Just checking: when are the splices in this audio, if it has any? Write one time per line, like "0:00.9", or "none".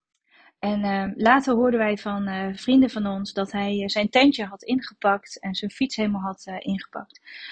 none